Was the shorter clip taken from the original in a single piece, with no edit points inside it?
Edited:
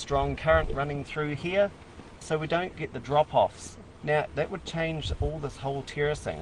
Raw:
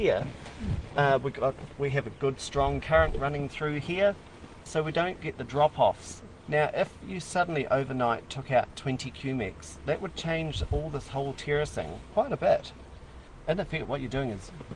no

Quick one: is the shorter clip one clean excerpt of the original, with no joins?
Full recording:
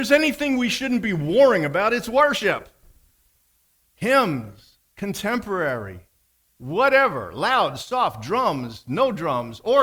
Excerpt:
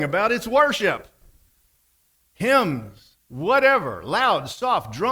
no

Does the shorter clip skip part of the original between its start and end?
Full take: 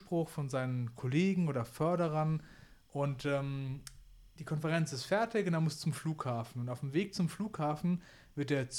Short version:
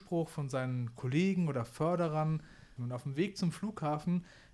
yes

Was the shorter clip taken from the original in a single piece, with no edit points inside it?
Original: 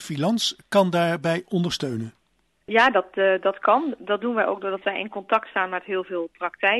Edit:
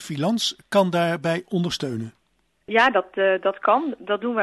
yes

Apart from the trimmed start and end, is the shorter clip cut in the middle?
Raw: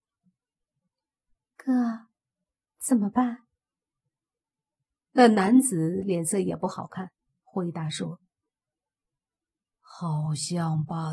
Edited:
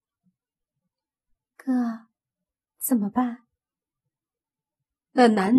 no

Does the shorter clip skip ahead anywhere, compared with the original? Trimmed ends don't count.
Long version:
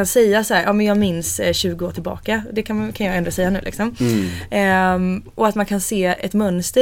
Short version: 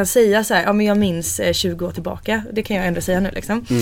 yes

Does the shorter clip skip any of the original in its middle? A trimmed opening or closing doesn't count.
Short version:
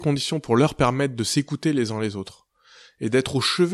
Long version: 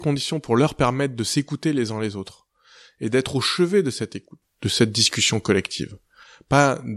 no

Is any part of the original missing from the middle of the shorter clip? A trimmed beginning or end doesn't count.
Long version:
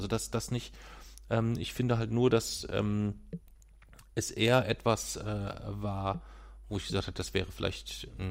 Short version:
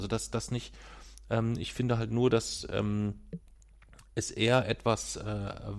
no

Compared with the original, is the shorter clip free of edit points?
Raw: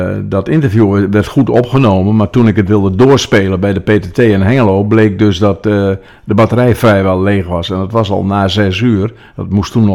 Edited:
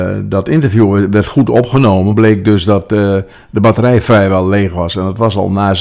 no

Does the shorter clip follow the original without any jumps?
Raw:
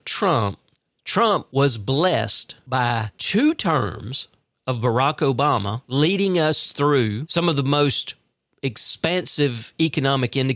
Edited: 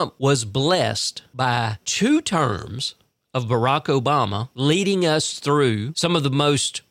yes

